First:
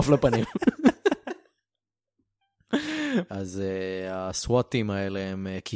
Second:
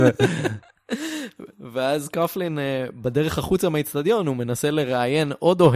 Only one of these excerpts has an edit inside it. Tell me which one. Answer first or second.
first